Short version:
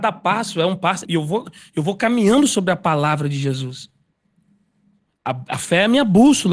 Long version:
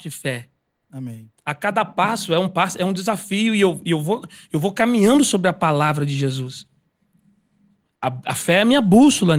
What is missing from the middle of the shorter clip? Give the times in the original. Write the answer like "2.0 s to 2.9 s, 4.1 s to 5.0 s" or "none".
2.8 s to 3.8 s